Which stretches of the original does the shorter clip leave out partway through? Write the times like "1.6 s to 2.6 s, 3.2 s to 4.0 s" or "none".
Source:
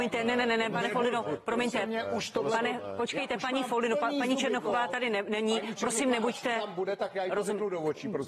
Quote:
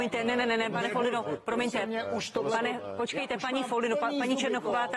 none